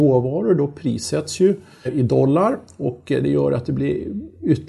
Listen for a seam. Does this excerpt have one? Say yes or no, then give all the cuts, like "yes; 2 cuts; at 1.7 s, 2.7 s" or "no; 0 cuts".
yes; 1 cut; at 1.9 s